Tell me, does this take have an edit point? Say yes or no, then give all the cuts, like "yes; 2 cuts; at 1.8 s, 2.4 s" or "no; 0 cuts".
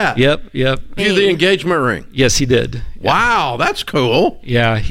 yes; 1 cut; at 1.0 s